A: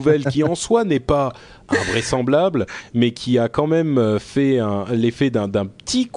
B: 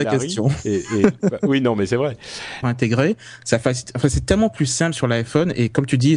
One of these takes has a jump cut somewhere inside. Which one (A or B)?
B